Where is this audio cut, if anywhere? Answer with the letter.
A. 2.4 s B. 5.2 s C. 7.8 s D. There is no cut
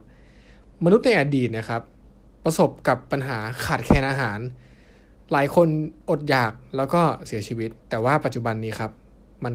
C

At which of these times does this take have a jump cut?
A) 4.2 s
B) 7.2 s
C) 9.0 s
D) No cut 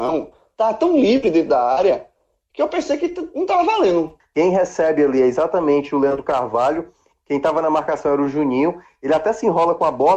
A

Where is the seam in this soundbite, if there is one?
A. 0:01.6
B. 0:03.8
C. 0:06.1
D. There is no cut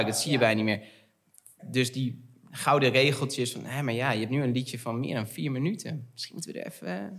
A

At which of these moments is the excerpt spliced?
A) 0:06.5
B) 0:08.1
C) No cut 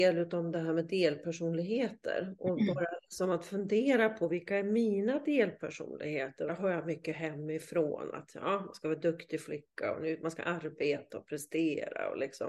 A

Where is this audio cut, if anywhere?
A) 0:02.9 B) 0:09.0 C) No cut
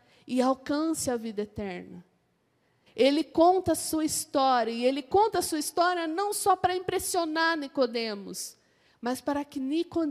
A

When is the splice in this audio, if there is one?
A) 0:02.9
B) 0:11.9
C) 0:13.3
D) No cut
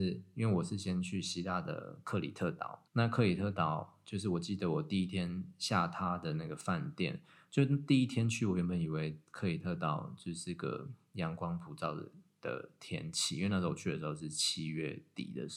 A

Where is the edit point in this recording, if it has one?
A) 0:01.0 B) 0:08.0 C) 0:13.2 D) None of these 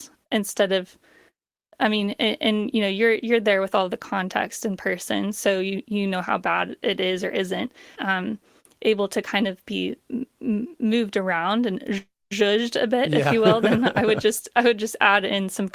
B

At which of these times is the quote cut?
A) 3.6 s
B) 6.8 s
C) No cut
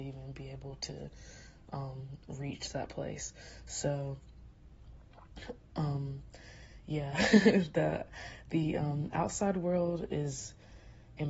C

